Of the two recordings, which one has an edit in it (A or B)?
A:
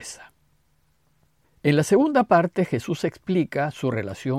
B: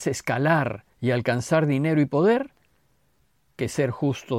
B